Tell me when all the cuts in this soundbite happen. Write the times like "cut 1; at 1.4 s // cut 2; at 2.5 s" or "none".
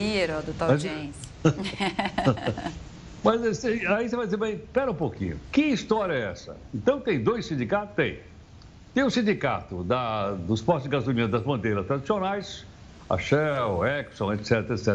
none